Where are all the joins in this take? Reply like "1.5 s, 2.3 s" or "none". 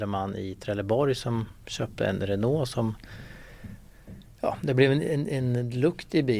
none